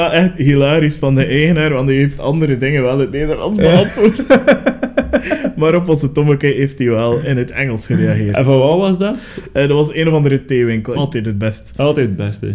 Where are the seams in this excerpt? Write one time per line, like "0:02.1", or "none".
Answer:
0:07.2
0:10.9